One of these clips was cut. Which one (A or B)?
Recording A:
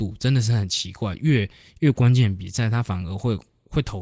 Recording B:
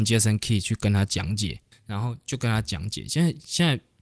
B